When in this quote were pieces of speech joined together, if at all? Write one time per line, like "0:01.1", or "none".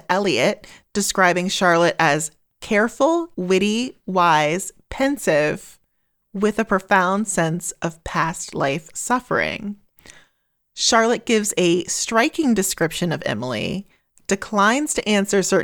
0:03.3